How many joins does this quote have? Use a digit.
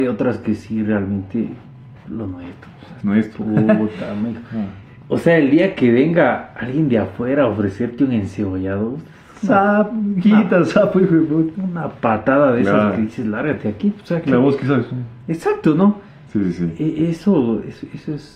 1